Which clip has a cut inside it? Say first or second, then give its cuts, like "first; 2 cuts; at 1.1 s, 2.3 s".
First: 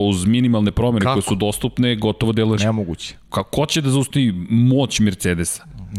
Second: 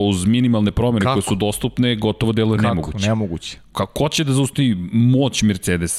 first; 1 cut; at 2.6 s